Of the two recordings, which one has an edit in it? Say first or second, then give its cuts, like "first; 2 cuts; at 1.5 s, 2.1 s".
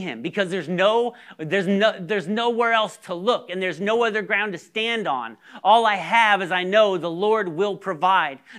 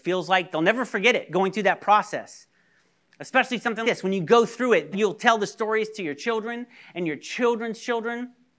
second; 2 cuts; at 3.8 s, 4.9 s